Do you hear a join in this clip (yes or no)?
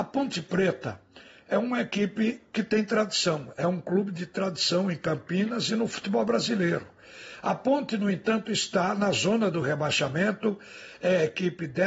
no